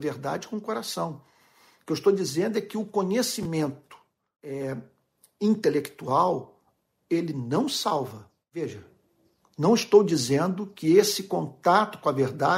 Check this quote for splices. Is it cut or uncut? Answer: cut